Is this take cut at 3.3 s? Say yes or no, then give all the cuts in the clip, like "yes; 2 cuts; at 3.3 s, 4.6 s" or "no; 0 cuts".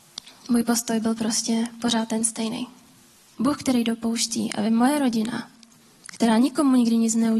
yes; 1 cut; at 3.3 s